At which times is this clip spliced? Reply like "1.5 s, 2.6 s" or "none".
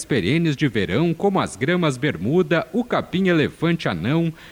none